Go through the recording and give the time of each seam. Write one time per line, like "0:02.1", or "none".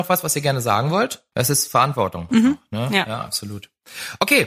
0:01.3